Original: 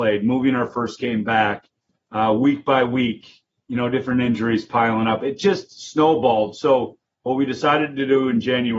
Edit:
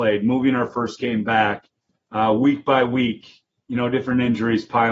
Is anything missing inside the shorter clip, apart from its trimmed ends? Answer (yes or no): no